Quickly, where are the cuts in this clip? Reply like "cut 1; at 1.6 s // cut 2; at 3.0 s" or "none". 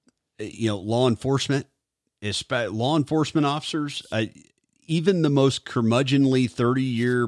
none